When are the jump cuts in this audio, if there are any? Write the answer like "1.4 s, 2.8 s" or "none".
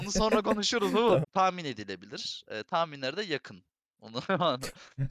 1.2 s